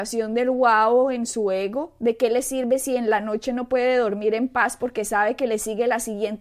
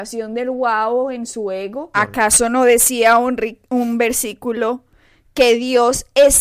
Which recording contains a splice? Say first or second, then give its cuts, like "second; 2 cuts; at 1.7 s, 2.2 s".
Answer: second; 1 cut; at 1.9 s